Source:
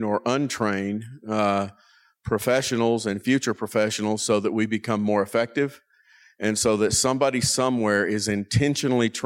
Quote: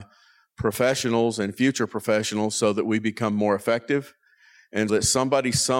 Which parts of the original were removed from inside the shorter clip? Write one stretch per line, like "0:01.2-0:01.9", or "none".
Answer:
0:06.6-0:06.8